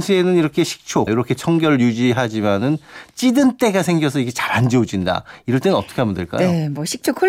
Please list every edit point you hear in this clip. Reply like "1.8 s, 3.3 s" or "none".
1.1 s